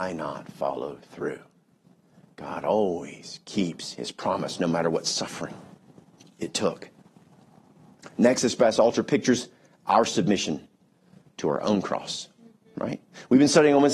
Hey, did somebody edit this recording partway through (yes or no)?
no